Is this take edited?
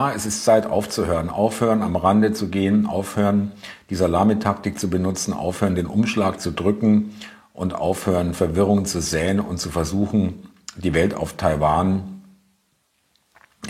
no; 0 cuts

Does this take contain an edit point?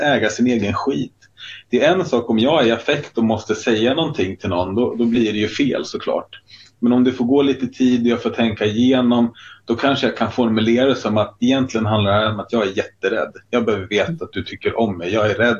no; 0 cuts

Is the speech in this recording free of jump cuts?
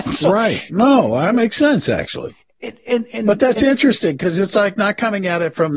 yes; 0 cuts

